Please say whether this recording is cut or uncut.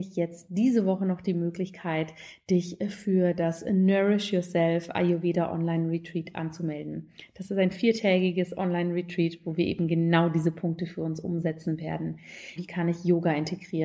cut